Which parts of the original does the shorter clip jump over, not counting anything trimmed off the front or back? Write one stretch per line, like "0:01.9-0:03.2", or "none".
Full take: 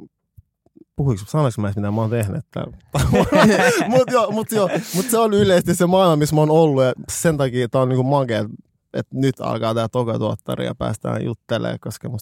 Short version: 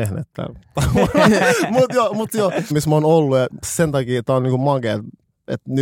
0:04.9-0:06.2